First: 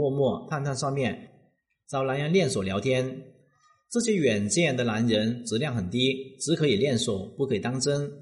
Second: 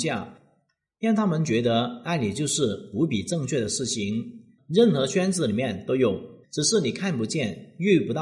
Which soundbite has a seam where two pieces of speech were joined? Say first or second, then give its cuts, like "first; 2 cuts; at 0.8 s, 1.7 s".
second; 2 cuts; at 4.6 s, 6.4 s